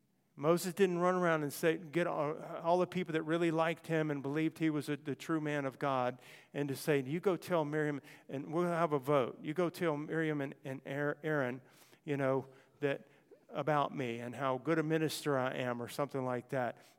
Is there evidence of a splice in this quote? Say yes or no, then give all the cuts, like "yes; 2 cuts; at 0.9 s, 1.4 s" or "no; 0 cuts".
no; 0 cuts